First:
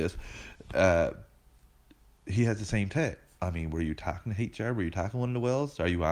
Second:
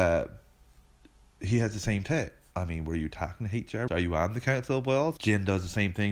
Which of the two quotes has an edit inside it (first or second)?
second